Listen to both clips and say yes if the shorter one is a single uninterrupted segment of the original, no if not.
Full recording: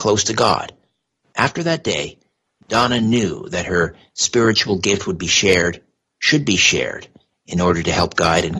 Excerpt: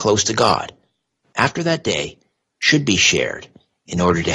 no